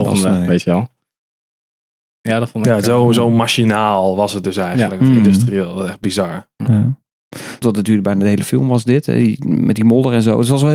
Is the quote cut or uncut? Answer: cut